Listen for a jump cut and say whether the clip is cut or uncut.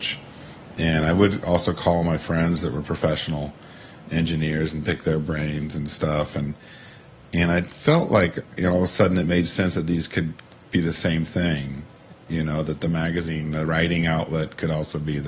uncut